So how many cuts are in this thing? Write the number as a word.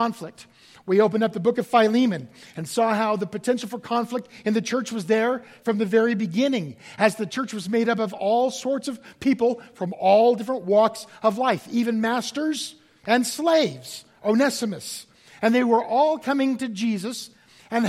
one